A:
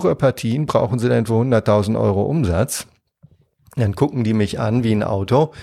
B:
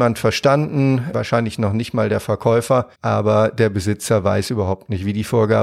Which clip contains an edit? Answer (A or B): B